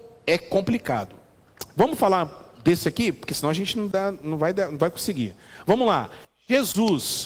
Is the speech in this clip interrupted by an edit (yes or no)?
no